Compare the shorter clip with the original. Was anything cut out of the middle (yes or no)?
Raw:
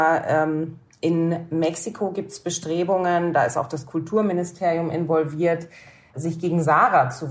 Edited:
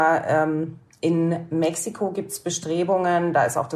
no